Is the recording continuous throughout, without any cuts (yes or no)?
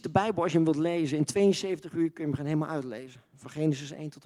yes